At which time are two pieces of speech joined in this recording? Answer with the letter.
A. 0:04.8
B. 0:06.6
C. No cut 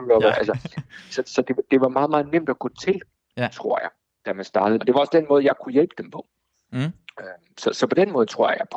A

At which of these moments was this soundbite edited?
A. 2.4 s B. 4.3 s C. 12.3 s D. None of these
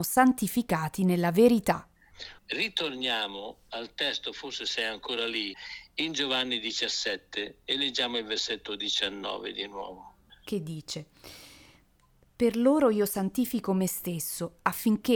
A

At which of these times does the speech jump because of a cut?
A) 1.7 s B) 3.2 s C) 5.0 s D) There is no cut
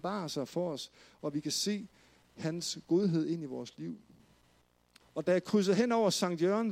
C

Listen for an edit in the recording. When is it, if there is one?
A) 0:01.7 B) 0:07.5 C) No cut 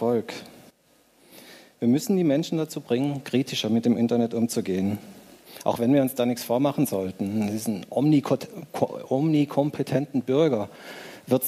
C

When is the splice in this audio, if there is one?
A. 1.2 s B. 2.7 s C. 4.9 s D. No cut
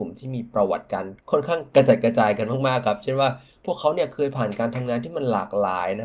A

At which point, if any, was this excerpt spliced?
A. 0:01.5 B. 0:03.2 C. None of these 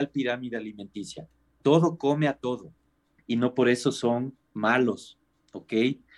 B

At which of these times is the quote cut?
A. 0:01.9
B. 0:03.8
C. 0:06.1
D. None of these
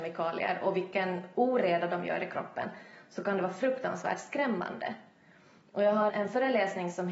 C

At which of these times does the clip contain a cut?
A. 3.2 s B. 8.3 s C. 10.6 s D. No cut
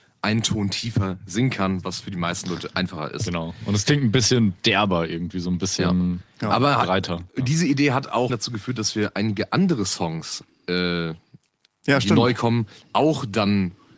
B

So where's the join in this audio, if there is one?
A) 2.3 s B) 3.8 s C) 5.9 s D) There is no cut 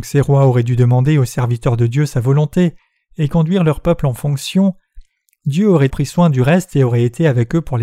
C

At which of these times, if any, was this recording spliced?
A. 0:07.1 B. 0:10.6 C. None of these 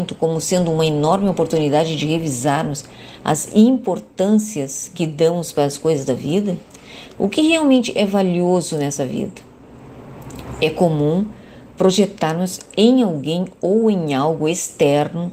A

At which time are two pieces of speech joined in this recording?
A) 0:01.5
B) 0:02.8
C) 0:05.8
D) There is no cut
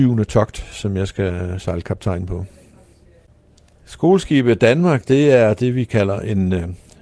D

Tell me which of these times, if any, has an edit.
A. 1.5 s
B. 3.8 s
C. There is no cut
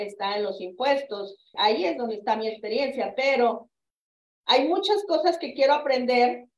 A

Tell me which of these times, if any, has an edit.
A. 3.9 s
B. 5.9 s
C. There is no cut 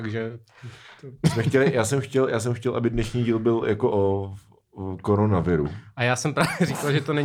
A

